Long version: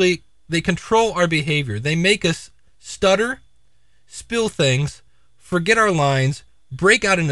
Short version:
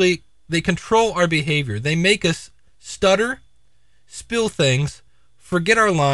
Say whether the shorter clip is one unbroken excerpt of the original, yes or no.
yes